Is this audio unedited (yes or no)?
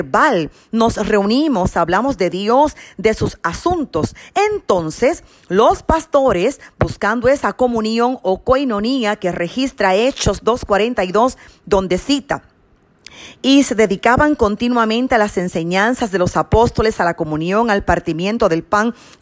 yes